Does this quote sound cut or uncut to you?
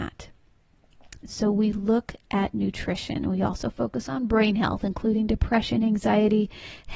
cut